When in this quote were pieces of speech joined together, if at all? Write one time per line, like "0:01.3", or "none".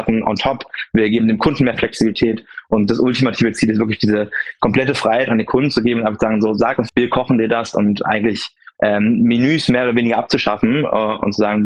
0:06.9